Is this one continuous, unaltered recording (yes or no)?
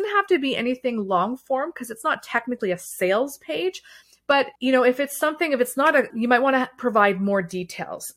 no